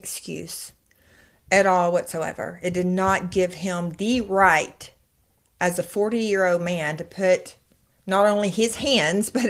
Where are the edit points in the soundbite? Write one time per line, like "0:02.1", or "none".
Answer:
none

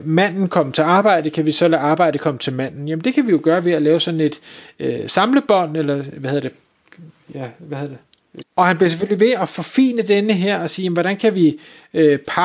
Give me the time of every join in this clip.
0:08.4

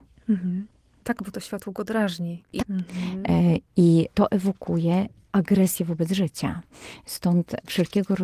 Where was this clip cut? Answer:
0:02.6

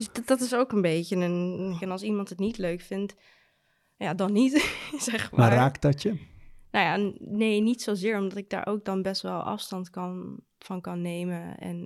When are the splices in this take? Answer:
0:01.8

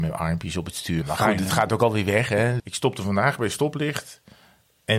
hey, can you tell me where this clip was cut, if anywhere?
0:01.0
0:02.6

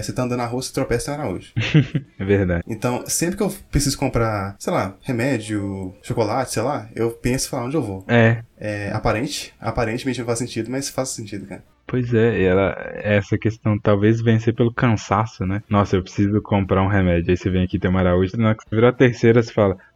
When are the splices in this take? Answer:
0:08.1
0:18.3

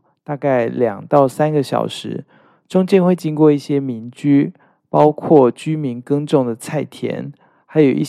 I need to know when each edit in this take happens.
none

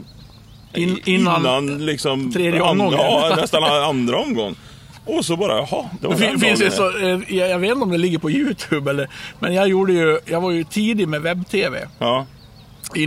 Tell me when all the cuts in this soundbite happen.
none

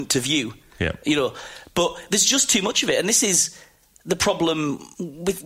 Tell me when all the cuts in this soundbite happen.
none

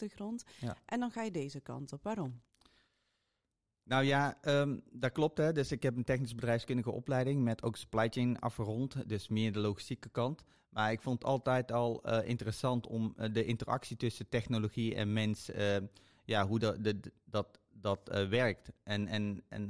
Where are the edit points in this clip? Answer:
none

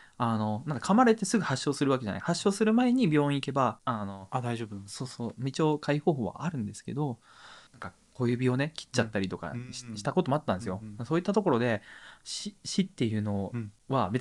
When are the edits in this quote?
none

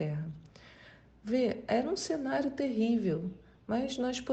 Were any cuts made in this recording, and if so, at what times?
none

